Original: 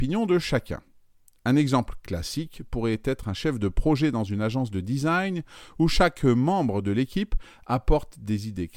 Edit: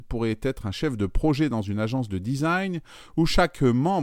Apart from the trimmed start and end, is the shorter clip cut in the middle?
no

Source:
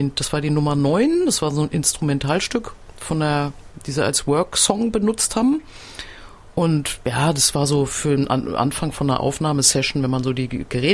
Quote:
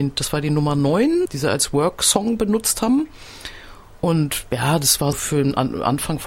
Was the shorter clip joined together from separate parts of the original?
yes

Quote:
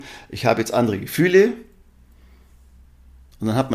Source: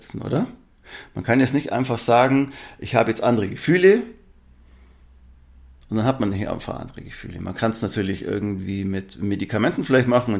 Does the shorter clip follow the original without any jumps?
yes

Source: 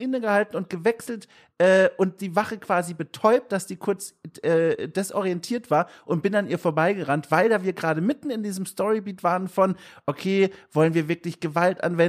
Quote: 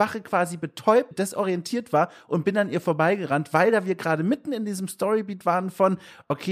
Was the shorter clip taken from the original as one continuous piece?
no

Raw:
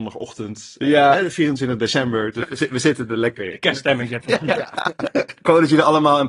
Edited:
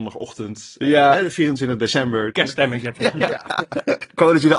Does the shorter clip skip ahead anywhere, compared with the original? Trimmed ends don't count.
yes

